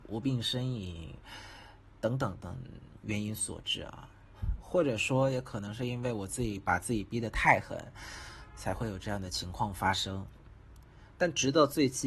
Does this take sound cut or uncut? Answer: cut